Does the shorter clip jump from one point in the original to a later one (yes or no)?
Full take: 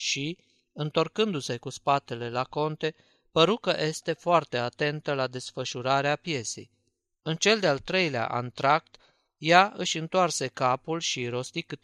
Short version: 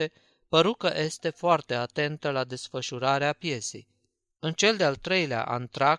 no